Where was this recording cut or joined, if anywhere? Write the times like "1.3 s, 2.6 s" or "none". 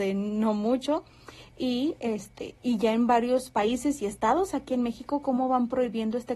none

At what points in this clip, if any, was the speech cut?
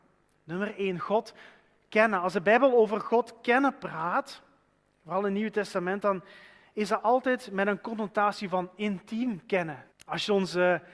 9.9 s

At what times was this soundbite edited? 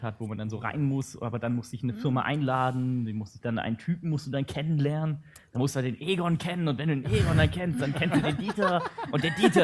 none

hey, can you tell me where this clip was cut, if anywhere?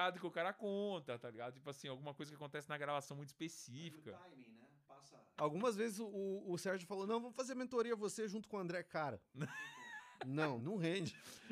5.4 s, 10.6 s

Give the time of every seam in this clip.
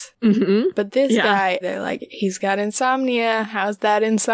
1.6 s

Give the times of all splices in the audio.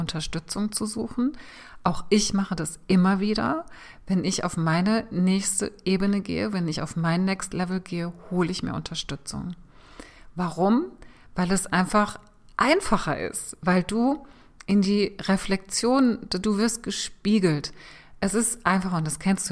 none

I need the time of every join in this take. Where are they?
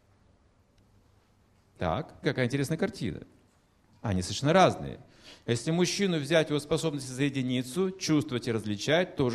2.2 s

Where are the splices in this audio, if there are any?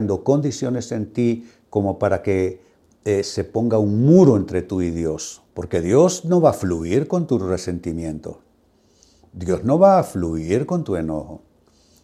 5.5 s

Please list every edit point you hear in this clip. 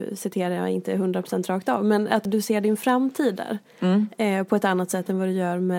2.3 s

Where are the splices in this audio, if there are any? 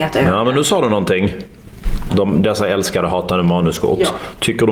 2.1 s

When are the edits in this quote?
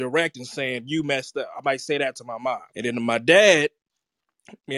2.7 s

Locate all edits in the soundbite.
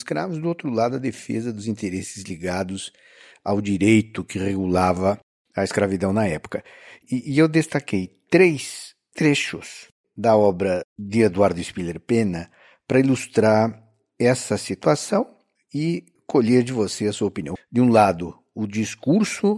17.6 s

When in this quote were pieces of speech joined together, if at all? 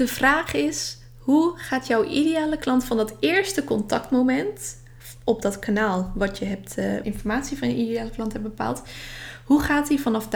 7.0 s

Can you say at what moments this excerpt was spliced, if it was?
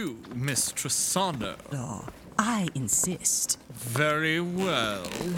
1.7 s

